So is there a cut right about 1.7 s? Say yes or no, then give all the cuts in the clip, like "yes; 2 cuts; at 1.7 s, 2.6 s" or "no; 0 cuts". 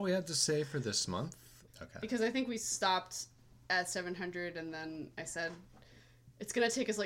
yes; 1 cut; at 1.7 s